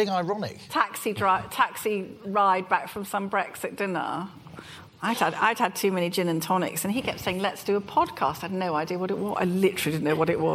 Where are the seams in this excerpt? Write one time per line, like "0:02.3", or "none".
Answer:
none